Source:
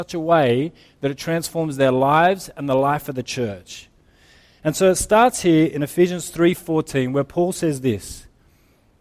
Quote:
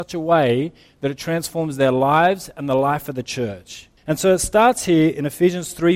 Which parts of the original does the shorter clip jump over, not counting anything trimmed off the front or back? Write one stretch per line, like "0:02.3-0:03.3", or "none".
0:04.0-0:04.5